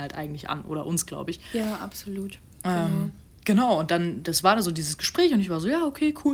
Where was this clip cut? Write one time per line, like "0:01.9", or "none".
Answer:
none